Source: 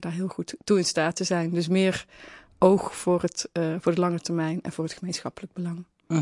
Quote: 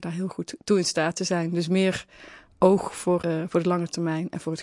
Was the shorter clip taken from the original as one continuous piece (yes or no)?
no